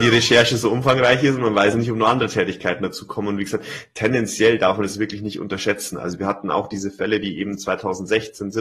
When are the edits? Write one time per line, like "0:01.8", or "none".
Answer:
none